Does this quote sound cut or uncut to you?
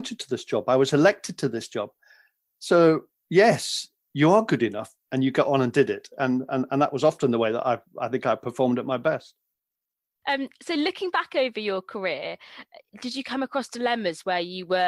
uncut